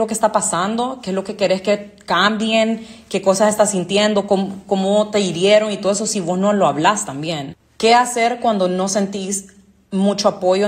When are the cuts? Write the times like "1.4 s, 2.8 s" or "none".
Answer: none